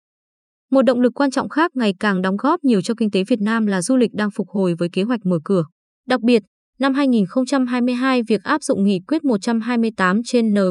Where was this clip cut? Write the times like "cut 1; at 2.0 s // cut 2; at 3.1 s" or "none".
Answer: cut 1; at 5.9 s